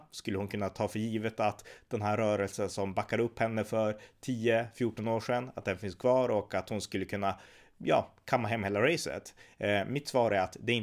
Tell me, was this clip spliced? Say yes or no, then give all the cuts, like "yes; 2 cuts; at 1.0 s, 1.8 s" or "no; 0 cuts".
no; 0 cuts